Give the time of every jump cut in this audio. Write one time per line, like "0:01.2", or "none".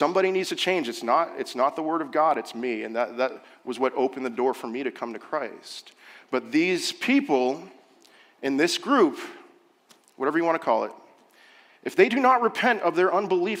none